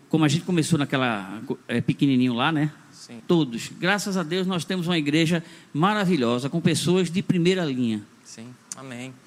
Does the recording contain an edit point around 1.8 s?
no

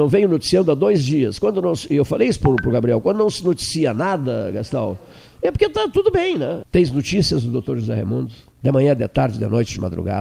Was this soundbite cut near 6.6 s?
yes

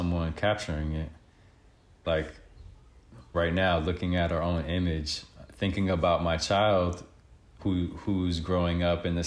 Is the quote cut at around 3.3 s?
yes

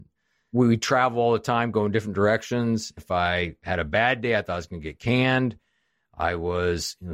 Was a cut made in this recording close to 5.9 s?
no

